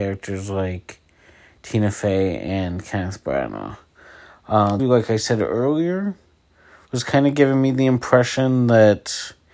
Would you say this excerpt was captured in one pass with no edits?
no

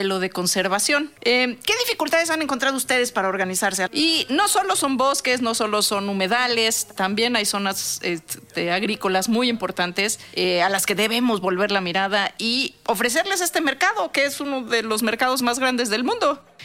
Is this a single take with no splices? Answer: no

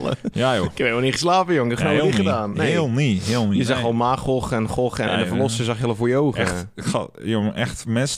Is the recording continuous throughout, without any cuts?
no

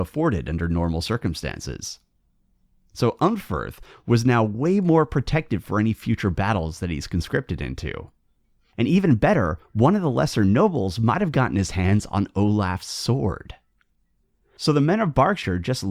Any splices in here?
no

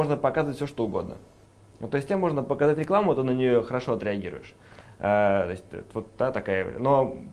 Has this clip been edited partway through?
no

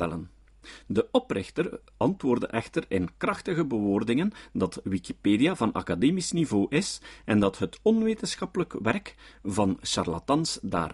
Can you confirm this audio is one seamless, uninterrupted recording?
yes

